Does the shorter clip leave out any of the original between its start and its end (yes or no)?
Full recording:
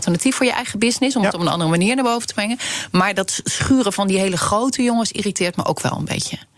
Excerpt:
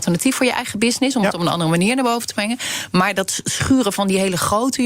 no